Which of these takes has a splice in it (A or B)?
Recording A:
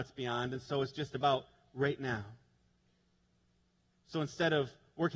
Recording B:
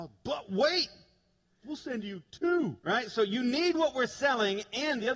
B